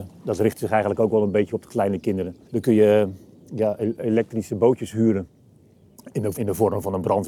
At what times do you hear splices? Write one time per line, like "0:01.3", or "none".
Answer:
0:02.4
0:06.3